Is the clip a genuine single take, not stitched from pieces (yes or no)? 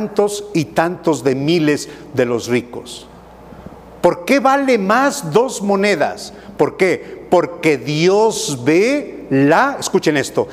yes